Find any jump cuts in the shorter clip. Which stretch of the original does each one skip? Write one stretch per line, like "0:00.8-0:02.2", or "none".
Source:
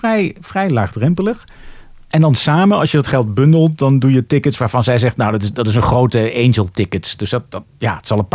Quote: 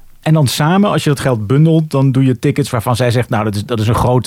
none